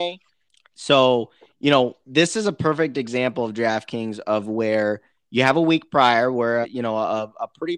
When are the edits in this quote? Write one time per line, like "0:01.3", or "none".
0:06.6